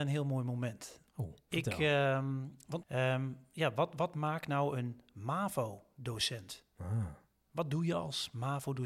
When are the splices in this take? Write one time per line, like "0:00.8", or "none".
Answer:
0:02.8